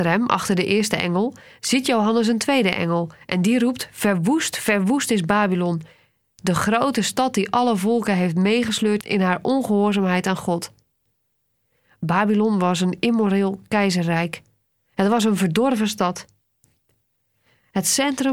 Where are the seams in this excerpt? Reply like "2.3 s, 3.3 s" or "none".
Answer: none